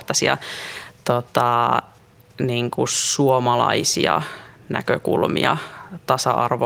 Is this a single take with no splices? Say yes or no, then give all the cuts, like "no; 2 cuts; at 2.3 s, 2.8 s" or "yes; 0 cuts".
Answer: yes; 0 cuts